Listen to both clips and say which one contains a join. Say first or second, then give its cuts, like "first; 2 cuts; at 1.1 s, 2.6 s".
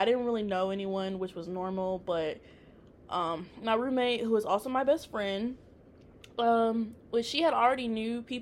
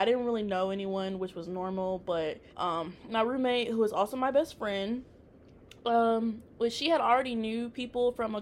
second; 1 cut; at 2.5 s